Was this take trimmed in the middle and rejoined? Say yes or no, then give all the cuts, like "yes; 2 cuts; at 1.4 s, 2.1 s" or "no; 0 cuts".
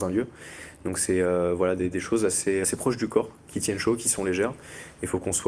yes; 1 cut; at 2.6 s